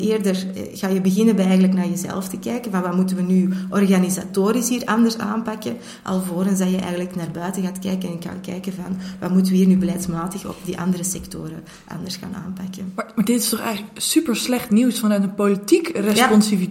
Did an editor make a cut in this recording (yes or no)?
no